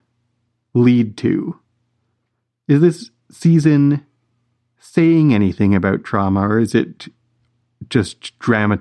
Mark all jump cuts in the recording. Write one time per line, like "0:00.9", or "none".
none